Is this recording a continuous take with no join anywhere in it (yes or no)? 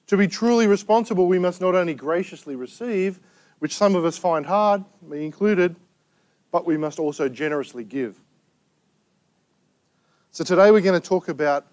yes